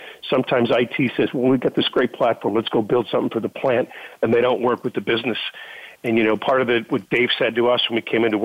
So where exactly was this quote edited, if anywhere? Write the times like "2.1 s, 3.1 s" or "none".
none

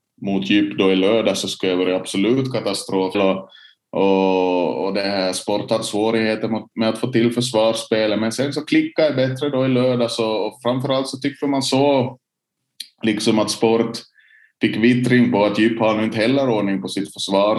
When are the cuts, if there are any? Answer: 3.1 s

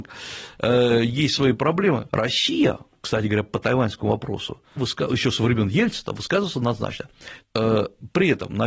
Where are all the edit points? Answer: 2.1 s, 4.8 s, 7.4 s

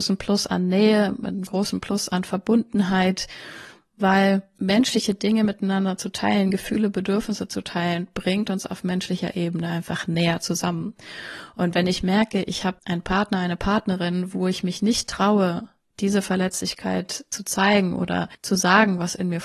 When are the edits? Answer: none

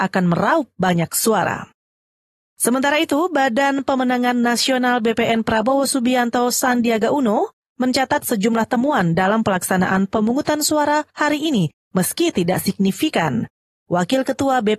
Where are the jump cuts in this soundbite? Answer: none

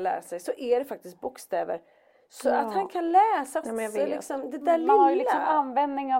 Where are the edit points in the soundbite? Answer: 3.6 s

